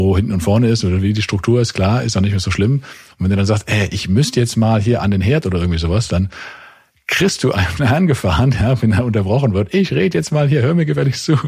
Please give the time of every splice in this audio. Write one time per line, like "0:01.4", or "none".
none